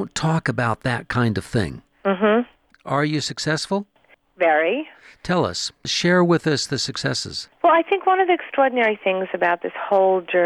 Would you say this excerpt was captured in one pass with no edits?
no; 1 cut; at 7.6 s

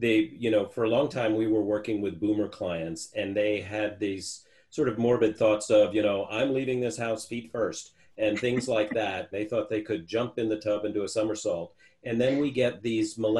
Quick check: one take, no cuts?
no; 1 cut; at 9.3 s

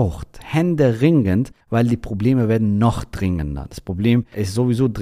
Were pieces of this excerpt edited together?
no; 0 cuts

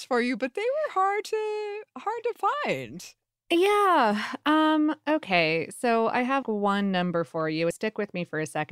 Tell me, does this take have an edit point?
yes; 2 cuts; at 6.4 s, 7.7 s

